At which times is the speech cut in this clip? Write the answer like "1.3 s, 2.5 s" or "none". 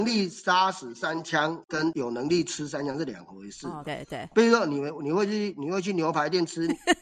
3.8 s

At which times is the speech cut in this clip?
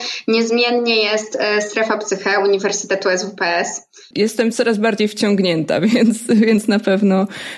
4.1 s

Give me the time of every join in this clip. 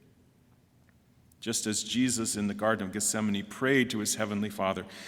none

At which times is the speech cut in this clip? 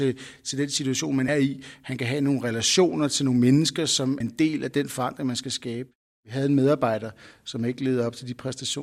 1.3 s, 4.2 s

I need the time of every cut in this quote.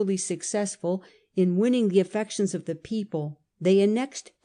3.5 s

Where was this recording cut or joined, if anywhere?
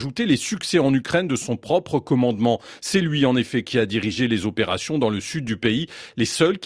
none

